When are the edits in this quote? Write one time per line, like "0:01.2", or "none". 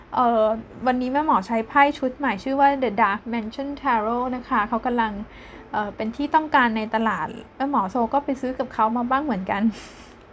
none